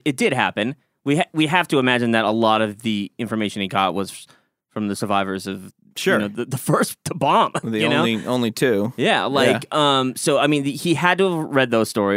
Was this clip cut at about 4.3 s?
no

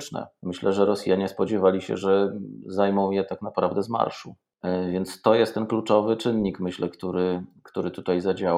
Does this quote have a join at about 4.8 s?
no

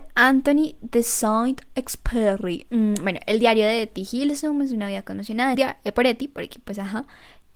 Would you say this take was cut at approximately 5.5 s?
yes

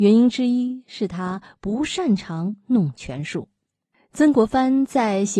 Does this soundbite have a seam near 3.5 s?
no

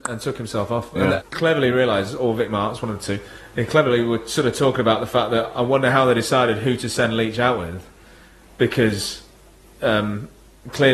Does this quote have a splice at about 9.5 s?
no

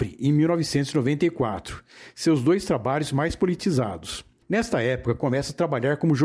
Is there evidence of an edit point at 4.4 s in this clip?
yes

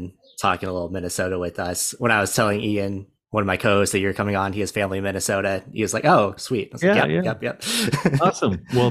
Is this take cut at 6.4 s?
yes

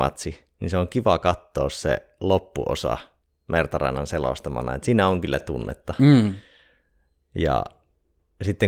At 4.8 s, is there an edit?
no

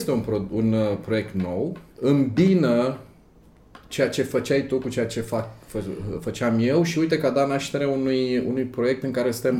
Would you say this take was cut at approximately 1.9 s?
yes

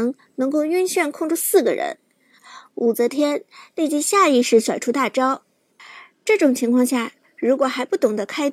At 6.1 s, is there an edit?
no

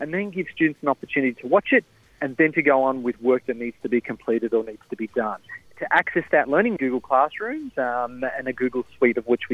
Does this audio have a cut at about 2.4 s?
no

